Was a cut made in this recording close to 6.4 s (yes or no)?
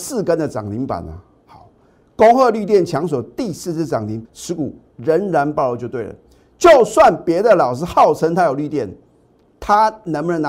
no